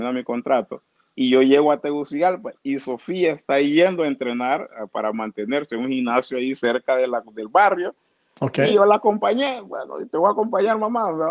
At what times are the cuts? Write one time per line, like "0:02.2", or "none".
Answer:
none